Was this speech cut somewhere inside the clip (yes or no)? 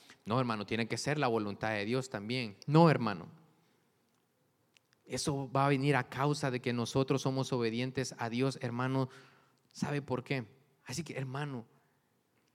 yes